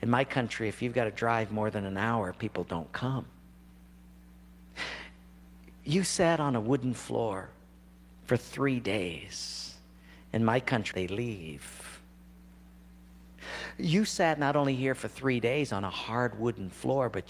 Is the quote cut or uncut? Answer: cut